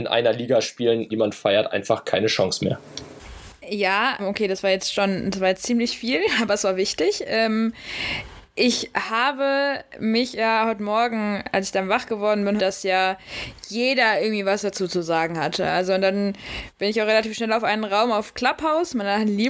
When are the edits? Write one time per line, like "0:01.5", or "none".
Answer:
0:01.1
0:04.2
0:12.6